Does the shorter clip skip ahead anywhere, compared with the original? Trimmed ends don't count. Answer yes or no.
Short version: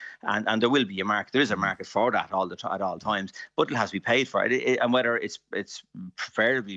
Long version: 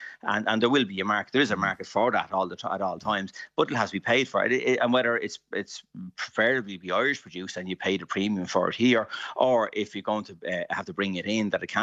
no